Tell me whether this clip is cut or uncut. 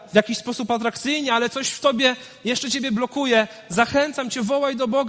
uncut